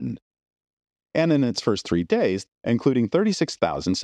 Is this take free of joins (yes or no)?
no